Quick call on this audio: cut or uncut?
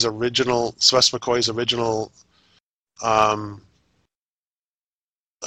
uncut